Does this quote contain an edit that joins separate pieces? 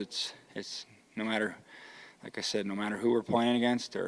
no; 0 cuts

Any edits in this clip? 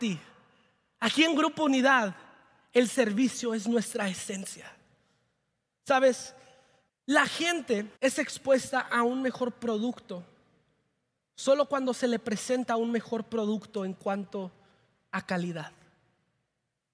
yes; 2 cuts; at 6.9 s, 8.0 s

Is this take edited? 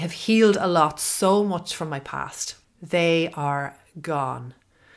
yes; 1 cut; at 2.6 s

